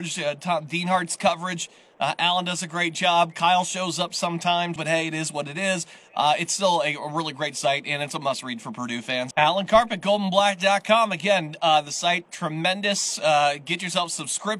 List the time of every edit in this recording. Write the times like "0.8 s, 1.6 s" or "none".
4.8 s, 9.3 s